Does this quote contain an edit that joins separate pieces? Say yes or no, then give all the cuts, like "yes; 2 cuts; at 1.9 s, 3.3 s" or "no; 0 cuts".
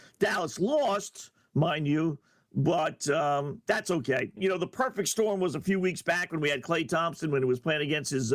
yes; 1 cut; at 4.4 s